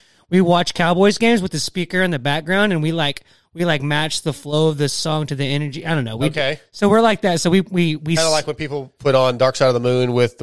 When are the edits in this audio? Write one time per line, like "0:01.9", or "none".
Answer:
none

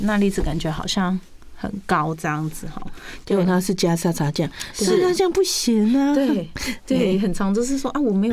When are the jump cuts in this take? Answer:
0:03.2

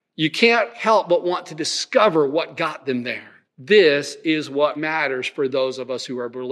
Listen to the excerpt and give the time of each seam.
0:03.4
0:04.8

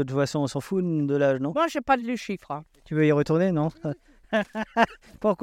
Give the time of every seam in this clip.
0:02.7

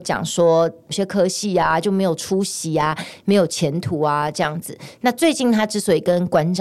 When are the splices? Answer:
0:00.9

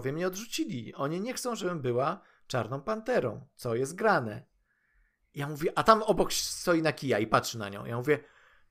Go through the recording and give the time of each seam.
none

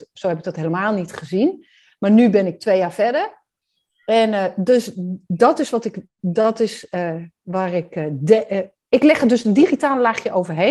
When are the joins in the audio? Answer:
none

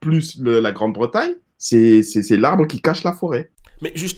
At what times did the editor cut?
none

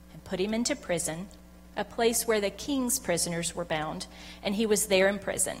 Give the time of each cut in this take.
none

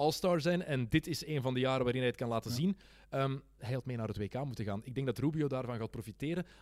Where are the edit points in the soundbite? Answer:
0:03.6

